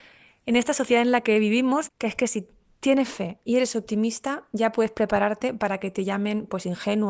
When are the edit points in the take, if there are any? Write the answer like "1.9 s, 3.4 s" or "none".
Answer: 1.9 s